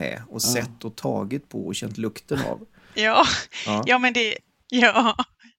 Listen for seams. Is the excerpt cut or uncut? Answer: uncut